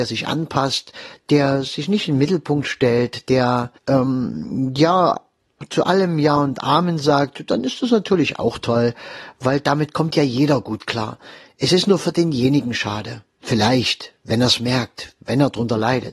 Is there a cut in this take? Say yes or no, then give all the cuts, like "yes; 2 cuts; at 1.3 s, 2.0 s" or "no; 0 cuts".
yes; 1 cut; at 3.8 s